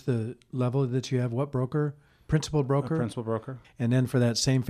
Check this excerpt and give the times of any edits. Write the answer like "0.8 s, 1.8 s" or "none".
3.6 s